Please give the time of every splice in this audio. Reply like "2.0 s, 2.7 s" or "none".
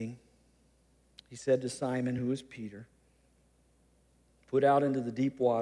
none